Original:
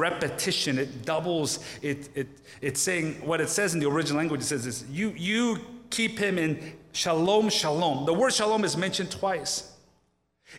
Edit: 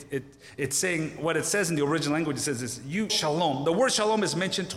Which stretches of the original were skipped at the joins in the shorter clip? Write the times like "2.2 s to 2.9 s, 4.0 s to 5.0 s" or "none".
5.1 s to 7.5 s